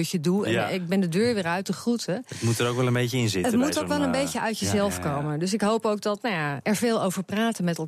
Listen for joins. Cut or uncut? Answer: cut